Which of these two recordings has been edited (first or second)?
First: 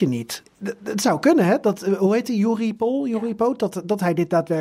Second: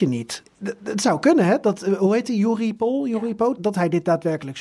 second